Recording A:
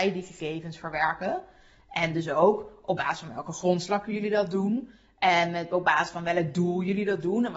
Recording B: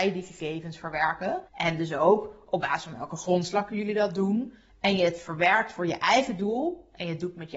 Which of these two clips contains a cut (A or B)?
B